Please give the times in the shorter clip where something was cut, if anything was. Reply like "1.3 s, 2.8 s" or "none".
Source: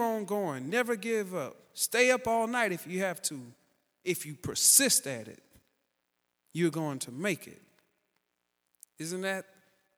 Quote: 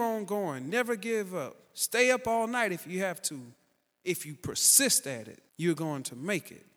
5.5 s